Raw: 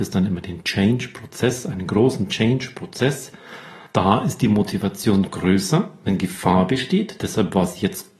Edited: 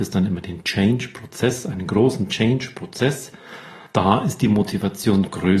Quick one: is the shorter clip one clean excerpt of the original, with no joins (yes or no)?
yes